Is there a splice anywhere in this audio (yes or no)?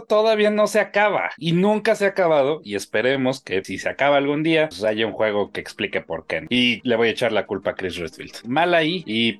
yes